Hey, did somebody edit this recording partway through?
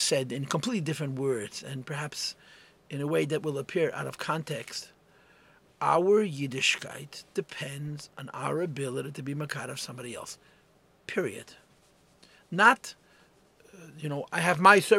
no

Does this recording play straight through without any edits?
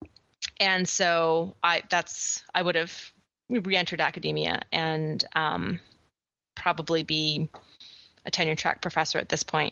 yes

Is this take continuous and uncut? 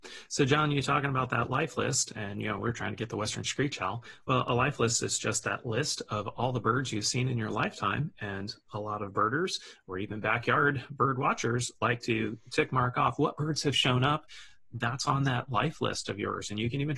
yes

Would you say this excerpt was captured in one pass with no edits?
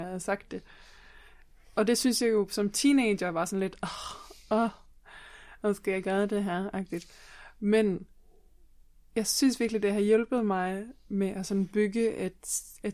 yes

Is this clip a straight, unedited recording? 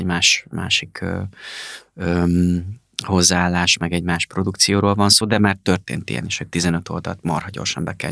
yes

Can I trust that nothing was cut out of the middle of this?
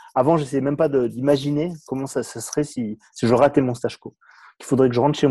yes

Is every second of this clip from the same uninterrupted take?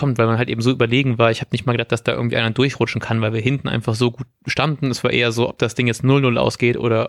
yes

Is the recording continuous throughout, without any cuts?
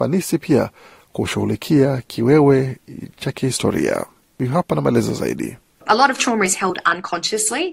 yes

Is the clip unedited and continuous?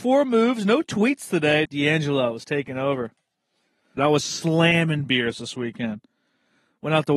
no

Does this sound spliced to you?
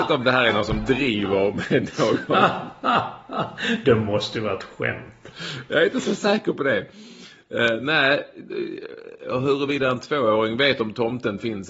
no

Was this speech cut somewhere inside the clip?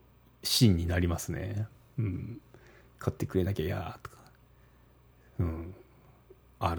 no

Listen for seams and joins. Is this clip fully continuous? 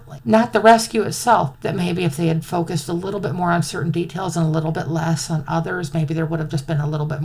no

